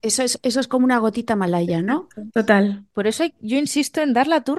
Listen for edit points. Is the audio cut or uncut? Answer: cut